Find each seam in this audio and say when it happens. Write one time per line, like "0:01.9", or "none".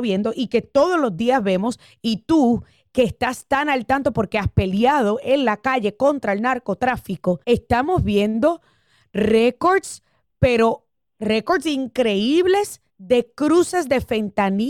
0:07.4
0:12.9